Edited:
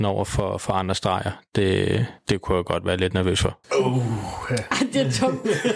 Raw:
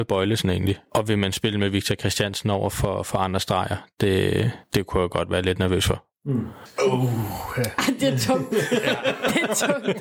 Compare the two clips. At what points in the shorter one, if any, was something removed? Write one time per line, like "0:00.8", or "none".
0:03.6